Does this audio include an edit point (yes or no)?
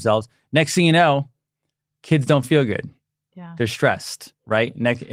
no